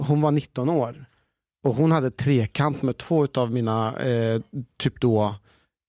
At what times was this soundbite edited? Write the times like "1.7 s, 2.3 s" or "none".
none